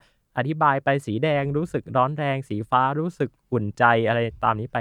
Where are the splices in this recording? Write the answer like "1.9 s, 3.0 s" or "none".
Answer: none